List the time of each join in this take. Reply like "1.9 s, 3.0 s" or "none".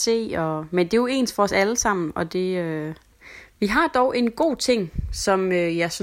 none

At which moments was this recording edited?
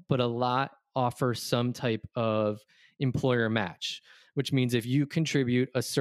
none

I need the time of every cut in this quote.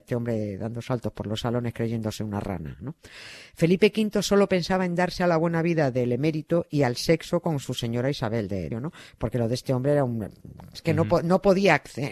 8.7 s, 10.8 s

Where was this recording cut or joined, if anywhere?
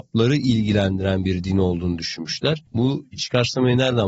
2.7 s

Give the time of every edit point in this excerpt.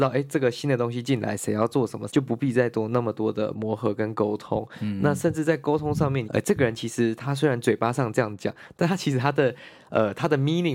2.1 s, 6.3 s

